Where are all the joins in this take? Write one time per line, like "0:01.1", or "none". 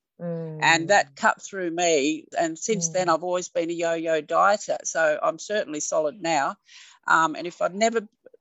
0:02.3